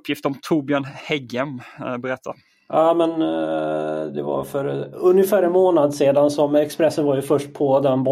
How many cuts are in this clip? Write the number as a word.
zero